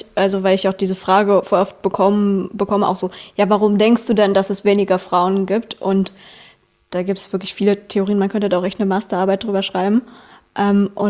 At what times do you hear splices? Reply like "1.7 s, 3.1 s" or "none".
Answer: none